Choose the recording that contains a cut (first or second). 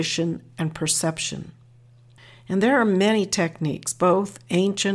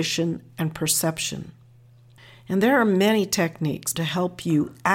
second